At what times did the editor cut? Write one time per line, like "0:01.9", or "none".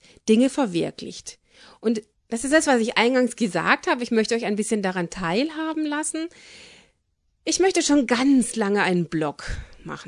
none